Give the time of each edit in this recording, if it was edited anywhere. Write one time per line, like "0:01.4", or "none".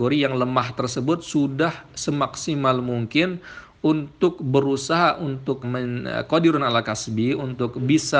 0:05.6